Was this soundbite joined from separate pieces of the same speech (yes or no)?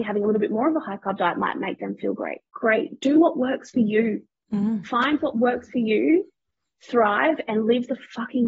yes